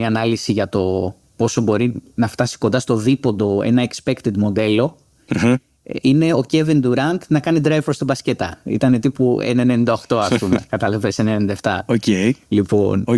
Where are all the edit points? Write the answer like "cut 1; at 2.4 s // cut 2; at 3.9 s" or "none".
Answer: none